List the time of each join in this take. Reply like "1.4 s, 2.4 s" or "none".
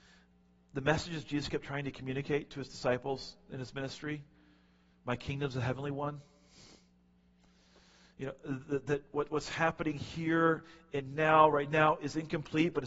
none